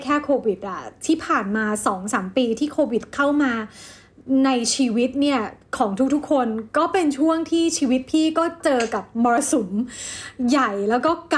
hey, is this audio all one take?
yes; 0 cuts

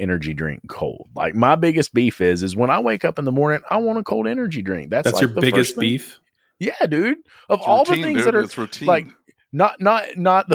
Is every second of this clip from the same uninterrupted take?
yes; 0 cuts

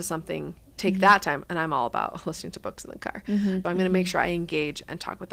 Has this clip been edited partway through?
yes; 1 cut; at 3.6 s

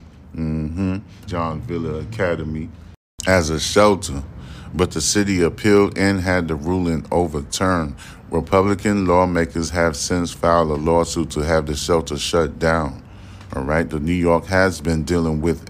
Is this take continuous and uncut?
no; 1 cut; at 1.3 s

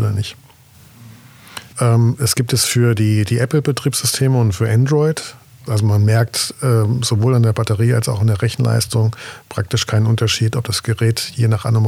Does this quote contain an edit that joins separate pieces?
yes; 2 cuts; at 1.7 s, 5.7 s

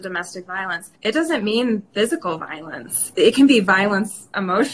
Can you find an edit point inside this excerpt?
yes; 1 cut; at 0.9 s

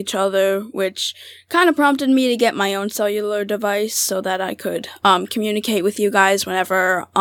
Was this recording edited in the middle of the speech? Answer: no; 0 cuts

